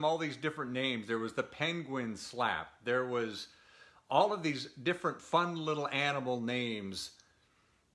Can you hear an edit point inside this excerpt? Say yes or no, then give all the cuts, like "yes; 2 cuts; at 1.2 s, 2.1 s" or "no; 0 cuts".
no; 0 cuts